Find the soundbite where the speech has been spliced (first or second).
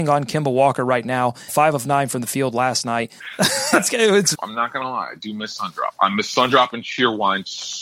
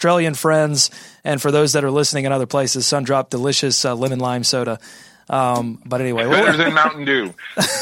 first